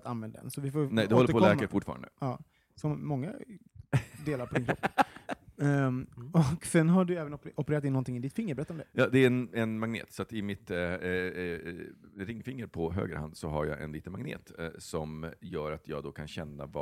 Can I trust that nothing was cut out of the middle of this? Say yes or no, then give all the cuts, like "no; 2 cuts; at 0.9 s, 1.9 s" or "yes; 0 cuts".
yes; 0 cuts